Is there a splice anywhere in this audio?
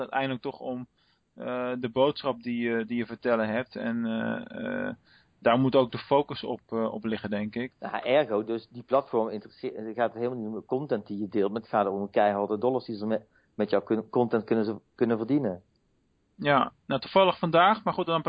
yes; 1 cut; at 7.7 s

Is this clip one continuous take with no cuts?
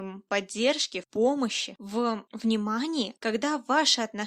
no; 1 cut; at 3.2 s

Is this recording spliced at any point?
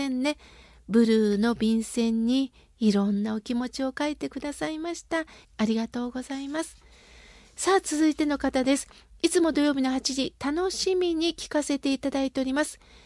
yes; 1 cut; at 5.4 s

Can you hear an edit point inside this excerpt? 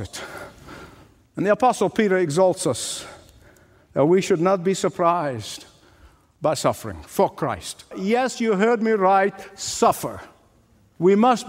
yes; 1 cut; at 7.9 s

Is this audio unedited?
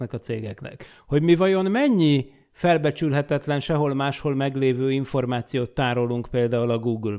yes; 0 cuts

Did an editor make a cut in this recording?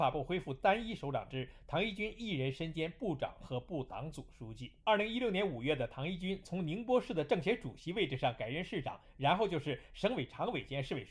yes; 1 cut; at 4.8 s

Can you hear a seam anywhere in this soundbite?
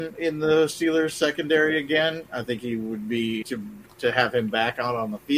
yes; 1 cut; at 3.4 s

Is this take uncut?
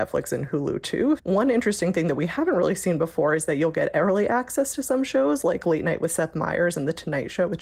no; 1 cut; at 1.2 s

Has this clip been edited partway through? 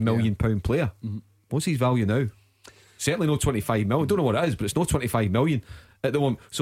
no; 0 cuts

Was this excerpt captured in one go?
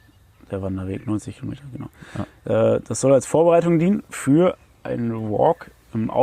yes; 0 cuts

